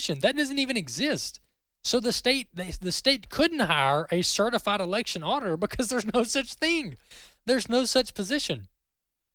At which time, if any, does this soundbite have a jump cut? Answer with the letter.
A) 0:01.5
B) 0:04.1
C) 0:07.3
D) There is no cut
D